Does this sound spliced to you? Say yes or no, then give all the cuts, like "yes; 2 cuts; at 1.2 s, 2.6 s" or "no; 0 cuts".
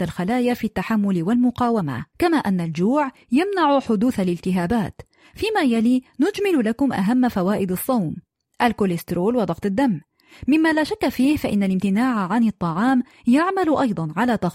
yes; 1 cut; at 2.1 s